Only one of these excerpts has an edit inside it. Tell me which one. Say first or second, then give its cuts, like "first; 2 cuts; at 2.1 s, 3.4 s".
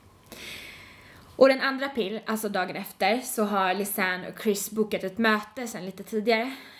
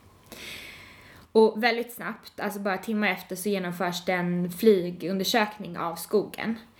second; 1 cut; at 1.2 s